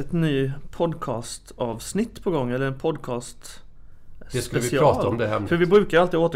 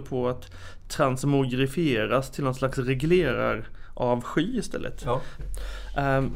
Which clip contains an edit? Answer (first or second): second